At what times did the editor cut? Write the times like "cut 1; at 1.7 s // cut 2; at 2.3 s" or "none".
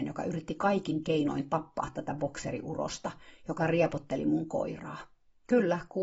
none